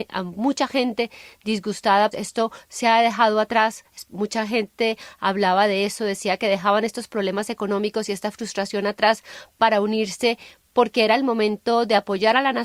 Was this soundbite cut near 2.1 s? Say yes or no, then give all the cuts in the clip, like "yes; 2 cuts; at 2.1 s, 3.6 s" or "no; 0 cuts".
yes; 1 cut; at 2.1 s